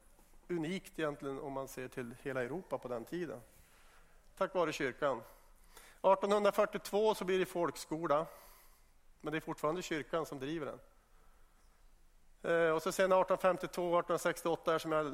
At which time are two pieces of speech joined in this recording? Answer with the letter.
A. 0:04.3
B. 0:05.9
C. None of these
C